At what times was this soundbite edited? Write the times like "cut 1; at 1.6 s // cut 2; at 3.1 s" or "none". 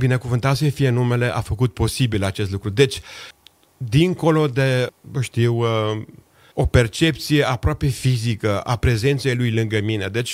none